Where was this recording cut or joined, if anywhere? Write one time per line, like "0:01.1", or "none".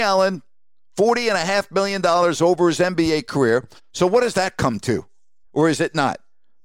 0:03.8
0:05.4